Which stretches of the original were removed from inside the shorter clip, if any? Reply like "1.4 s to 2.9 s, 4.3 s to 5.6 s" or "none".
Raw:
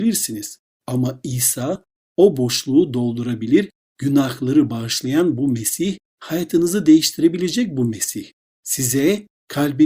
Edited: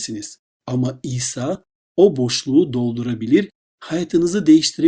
3.9 s to 6.1 s